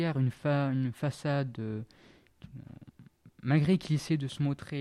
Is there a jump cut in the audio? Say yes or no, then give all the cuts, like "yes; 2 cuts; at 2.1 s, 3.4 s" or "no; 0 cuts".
no; 0 cuts